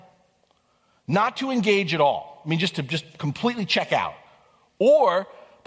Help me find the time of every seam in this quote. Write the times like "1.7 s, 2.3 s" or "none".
none